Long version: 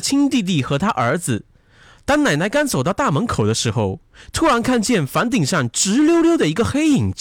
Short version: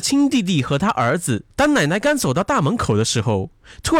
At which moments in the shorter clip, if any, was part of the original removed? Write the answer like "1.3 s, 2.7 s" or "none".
1.5 s